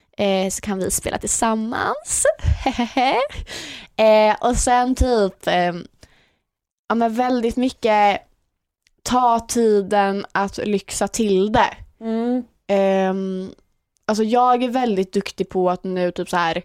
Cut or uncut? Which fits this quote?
uncut